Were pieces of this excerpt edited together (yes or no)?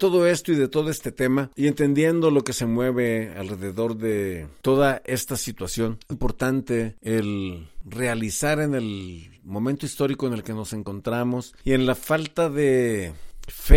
yes